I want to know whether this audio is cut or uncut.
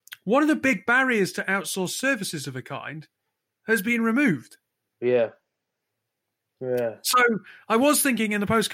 uncut